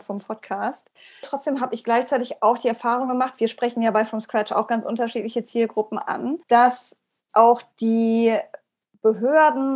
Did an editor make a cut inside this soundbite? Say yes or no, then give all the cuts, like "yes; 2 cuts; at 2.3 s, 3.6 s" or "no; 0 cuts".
yes; 2 cuts; at 1.2 s, 6.4 s